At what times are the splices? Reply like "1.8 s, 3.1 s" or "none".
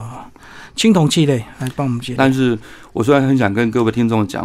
2.2 s

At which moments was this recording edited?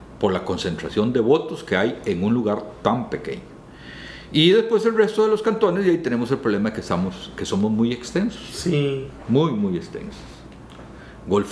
none

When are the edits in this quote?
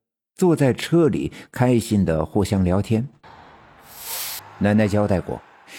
4.4 s

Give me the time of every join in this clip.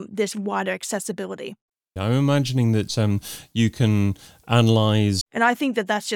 2.0 s, 5.2 s

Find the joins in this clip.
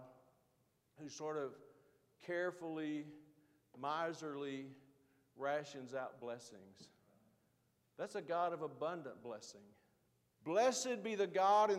10.4 s

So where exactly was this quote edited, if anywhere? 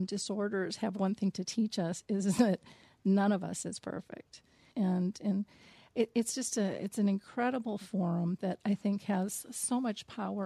4.7 s

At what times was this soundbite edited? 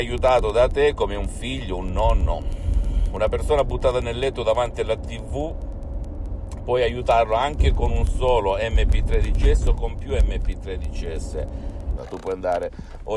12.0 s

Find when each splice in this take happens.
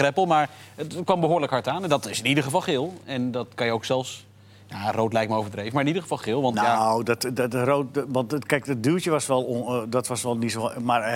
none

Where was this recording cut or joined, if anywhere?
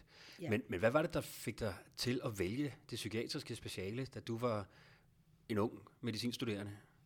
none

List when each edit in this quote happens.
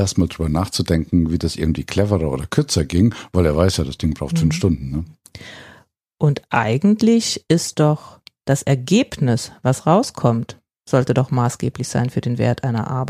none

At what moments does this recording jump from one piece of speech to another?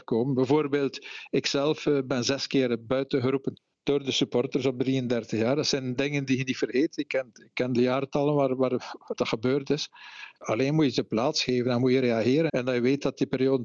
9.2 s, 12.5 s

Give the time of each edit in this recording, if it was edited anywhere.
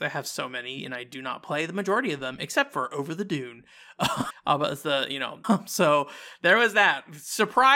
4.3 s, 5.4 s

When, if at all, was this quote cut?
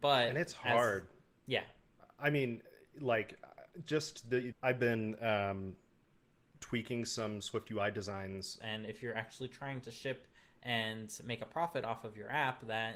4.5 s, 8.6 s

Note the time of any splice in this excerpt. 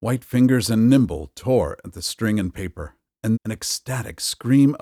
3.3 s

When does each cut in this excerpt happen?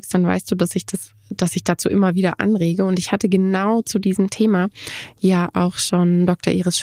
none

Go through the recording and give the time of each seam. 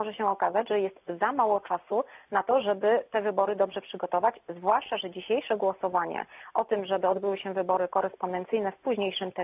none

